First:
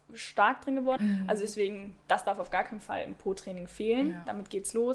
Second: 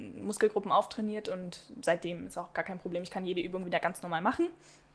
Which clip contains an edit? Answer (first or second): first